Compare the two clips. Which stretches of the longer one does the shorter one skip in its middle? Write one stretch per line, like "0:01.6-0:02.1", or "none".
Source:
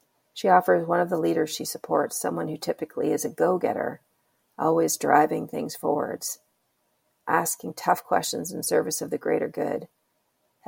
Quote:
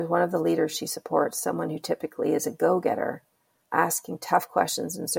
0:04.4-0:07.2